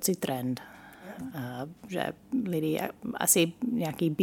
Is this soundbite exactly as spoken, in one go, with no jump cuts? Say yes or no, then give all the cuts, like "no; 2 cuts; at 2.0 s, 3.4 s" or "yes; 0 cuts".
yes; 0 cuts